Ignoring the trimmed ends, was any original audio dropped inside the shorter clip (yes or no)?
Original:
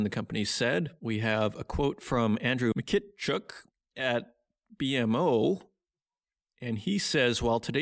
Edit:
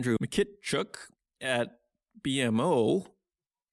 no